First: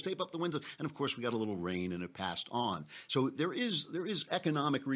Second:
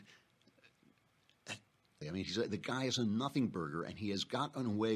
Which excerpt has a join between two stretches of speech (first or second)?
second